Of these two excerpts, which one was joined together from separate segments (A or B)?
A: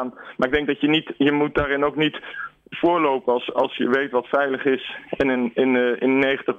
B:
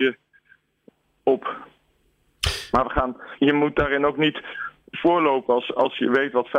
B